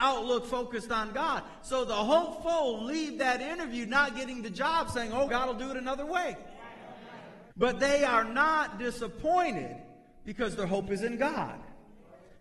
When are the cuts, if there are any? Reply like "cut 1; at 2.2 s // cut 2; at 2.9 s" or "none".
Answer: cut 1; at 5.3 s // cut 2; at 7.5 s